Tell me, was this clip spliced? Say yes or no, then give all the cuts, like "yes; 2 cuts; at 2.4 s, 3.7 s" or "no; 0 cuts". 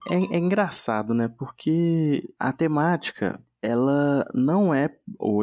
no; 0 cuts